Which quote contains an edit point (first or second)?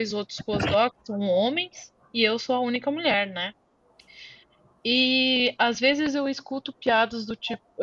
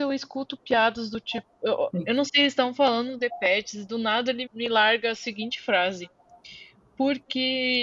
second